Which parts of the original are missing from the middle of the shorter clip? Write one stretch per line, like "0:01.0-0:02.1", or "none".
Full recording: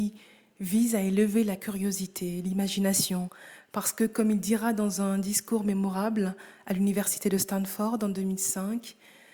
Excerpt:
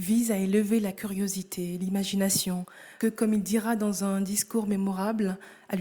0:03.6-0:04.0